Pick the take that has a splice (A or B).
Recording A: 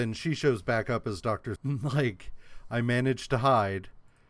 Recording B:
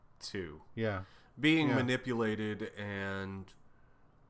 A